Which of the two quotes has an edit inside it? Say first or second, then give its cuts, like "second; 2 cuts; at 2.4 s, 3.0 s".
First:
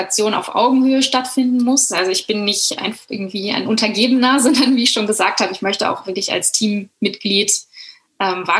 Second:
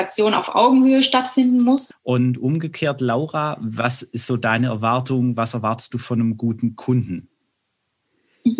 second; 1 cut; at 1.9 s